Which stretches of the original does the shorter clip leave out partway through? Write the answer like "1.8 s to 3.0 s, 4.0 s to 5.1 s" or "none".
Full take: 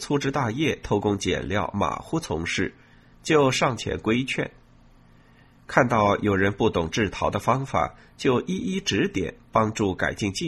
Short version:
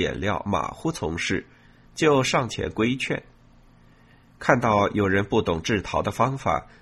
none